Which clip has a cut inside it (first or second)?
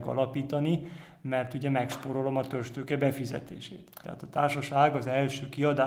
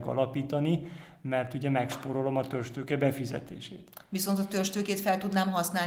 first